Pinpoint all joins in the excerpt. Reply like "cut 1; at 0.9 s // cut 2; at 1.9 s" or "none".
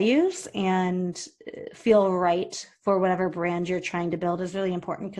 none